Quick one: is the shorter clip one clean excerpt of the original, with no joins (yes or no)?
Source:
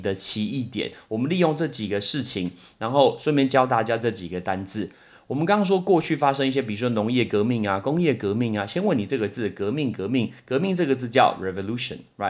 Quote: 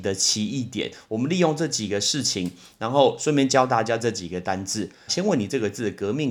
no